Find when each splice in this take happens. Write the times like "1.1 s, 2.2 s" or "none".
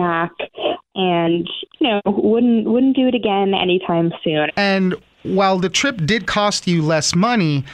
4.5 s